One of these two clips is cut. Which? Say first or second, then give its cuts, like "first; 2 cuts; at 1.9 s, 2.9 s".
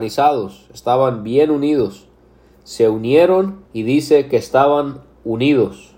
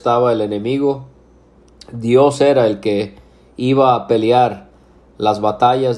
first; 1 cut; at 3.7 s